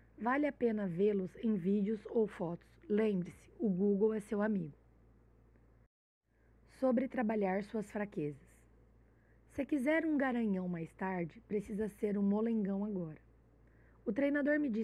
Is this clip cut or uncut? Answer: uncut